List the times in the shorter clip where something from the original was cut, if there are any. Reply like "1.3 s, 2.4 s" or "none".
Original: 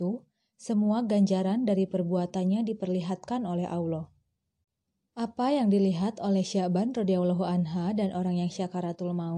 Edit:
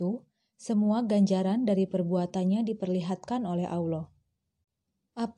none

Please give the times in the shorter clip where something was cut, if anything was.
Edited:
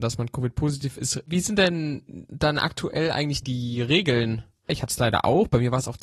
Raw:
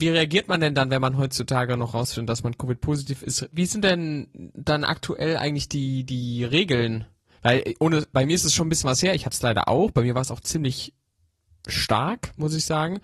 3.4 s, 4.7 s

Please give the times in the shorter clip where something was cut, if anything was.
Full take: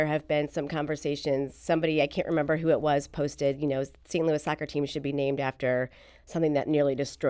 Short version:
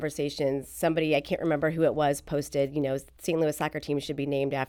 none

